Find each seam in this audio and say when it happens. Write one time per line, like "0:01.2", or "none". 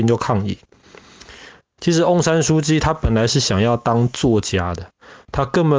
0:01.8